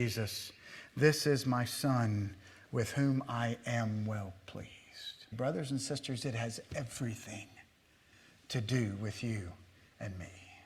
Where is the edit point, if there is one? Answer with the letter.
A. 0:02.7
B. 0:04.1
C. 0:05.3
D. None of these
C